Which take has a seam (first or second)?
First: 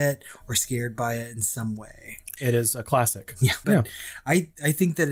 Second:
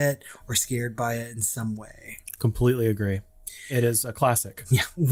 first